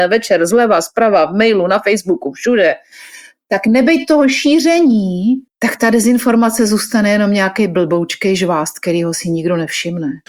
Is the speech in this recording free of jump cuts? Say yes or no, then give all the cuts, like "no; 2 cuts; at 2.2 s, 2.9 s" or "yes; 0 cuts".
no; 1 cut; at 5.5 s